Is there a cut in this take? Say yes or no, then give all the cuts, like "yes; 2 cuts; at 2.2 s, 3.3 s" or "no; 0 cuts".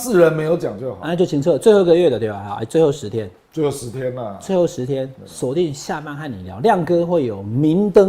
no; 0 cuts